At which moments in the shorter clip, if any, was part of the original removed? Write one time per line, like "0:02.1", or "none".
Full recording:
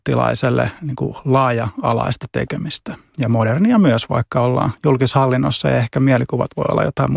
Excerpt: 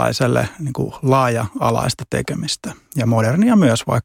none